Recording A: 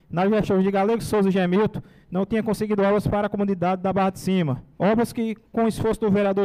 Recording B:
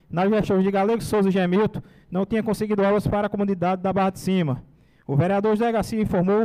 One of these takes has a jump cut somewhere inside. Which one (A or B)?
A